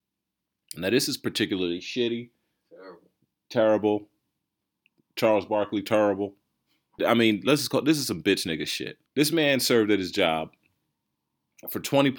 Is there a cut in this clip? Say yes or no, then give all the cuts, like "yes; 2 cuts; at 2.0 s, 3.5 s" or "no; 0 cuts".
yes; 2 cuts; at 7.0 s, 9.1 s